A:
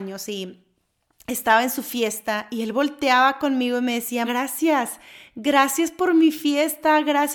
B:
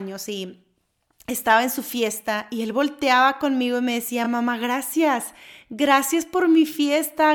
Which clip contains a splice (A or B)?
A